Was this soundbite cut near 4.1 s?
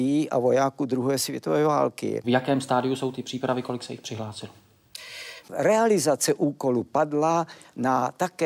no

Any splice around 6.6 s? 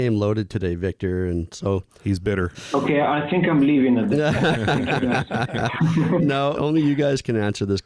yes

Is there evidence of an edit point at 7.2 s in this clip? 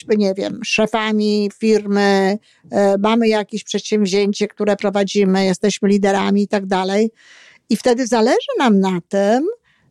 no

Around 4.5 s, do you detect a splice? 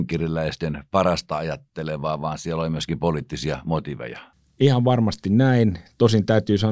no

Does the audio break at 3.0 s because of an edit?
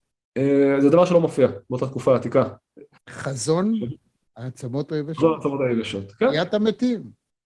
yes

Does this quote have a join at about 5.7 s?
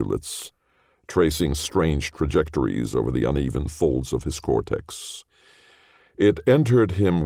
no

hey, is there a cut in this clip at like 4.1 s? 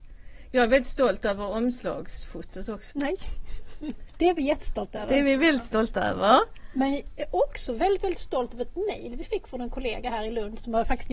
yes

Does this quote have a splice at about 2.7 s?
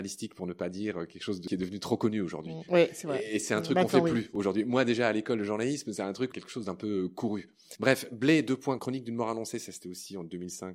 yes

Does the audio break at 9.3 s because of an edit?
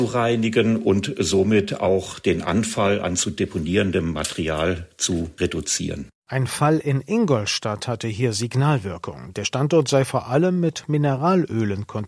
yes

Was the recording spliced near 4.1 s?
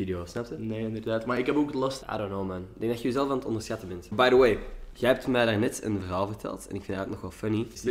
no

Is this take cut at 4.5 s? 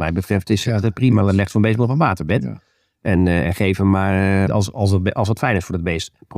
yes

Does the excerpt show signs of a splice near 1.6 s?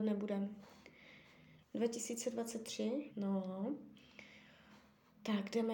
yes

